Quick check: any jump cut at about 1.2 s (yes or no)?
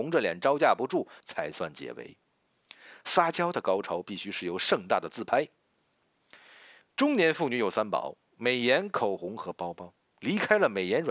yes